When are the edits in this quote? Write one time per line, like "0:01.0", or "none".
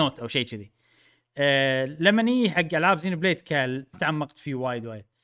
0:03.9